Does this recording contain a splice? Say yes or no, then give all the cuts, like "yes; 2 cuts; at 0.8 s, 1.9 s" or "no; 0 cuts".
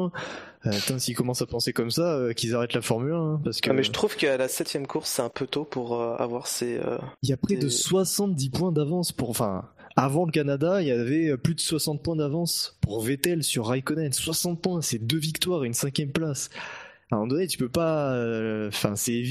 yes; 1 cut; at 7.2 s